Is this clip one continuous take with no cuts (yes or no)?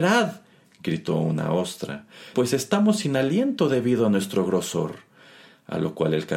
no